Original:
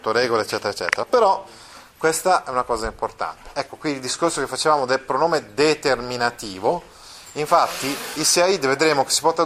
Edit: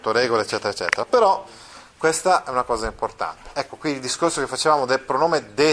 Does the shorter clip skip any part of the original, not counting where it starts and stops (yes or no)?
no